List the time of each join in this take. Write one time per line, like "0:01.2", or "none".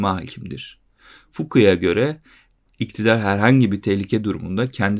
none